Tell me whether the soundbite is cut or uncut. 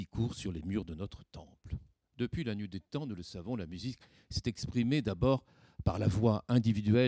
uncut